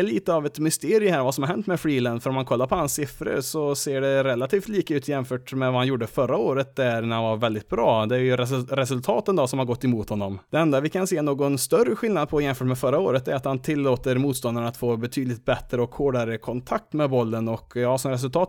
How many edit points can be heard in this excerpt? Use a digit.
0